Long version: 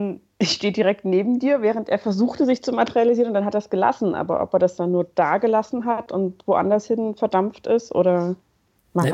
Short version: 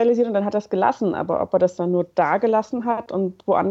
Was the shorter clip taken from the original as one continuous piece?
yes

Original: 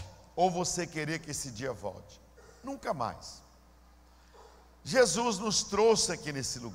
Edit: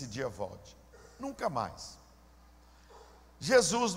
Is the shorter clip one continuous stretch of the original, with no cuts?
yes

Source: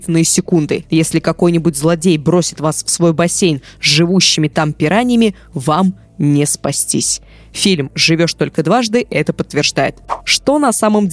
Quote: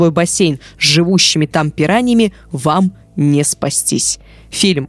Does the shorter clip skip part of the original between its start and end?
no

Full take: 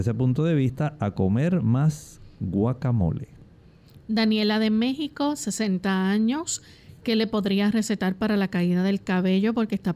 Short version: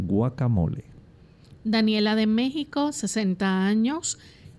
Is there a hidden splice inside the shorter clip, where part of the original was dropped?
no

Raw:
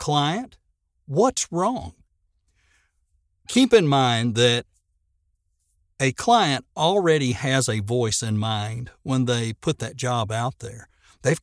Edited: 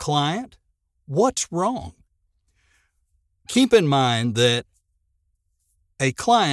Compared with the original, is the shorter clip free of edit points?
yes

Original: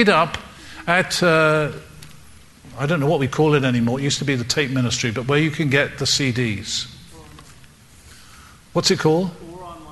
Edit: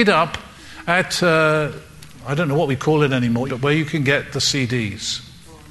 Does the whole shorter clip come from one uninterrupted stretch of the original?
no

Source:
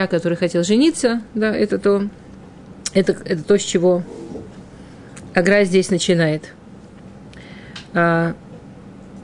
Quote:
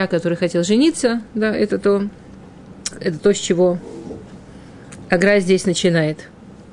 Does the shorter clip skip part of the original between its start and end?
yes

